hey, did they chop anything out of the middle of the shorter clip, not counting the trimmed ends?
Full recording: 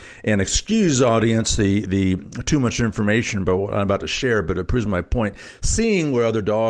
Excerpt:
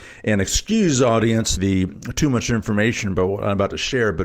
yes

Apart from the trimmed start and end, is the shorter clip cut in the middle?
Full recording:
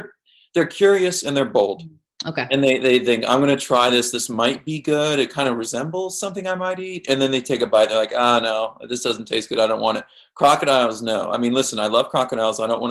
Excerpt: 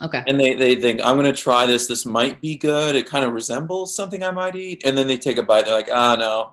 no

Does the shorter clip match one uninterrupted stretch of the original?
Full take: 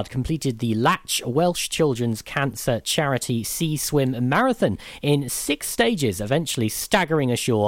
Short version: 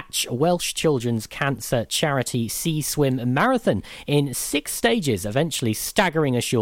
yes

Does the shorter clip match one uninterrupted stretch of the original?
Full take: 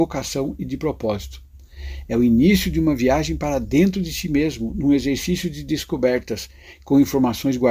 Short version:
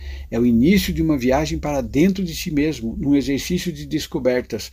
yes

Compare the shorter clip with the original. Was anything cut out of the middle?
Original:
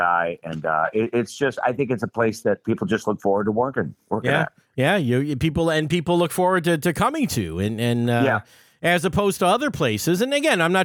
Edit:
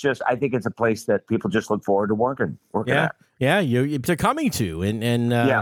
yes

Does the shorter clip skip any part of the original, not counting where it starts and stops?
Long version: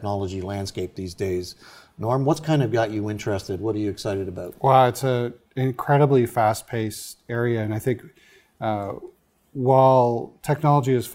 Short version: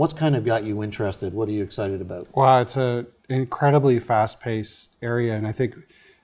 no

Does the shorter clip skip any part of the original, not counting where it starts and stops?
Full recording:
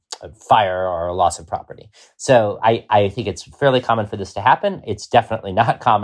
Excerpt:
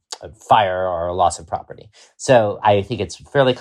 yes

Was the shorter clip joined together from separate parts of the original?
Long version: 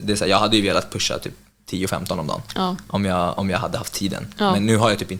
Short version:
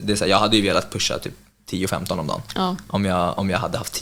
no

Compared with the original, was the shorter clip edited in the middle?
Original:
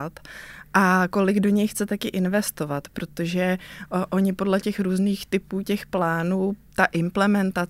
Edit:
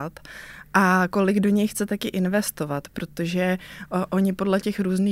no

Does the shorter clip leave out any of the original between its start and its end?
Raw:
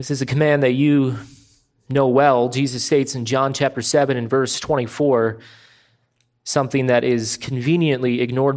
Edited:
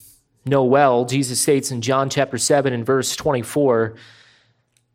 no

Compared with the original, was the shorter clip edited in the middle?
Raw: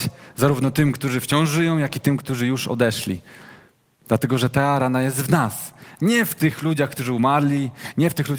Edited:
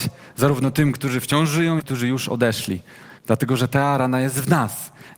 yes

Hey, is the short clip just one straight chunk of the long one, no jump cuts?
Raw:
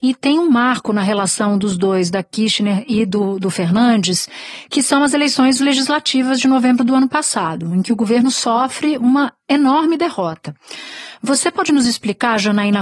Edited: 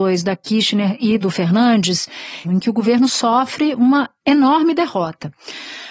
no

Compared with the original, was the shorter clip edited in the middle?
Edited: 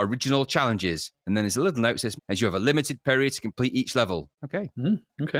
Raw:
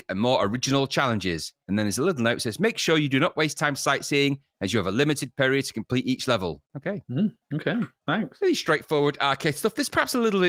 yes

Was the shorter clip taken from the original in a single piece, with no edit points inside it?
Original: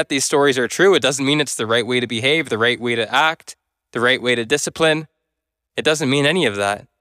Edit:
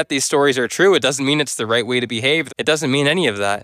no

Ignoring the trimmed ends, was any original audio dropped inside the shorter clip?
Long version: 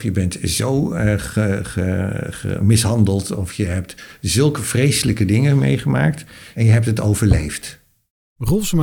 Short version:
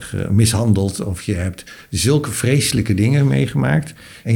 no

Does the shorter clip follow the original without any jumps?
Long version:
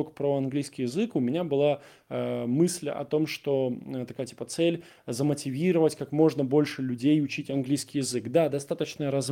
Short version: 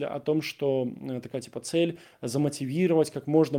yes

